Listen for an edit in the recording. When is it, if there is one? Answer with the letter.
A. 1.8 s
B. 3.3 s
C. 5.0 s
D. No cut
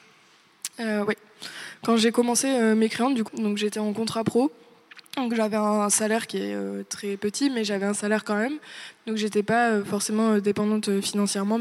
B